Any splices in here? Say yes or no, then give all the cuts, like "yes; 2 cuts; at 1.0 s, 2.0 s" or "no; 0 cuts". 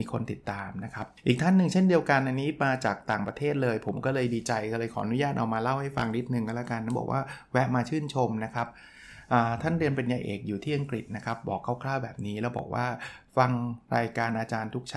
yes; 1 cut; at 1.2 s